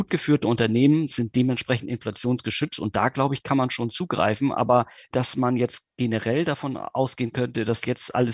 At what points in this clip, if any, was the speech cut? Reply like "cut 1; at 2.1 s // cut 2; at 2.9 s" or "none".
none